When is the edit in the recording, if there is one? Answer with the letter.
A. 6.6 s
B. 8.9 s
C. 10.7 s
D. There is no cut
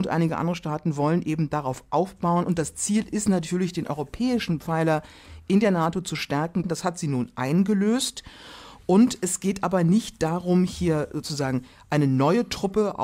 A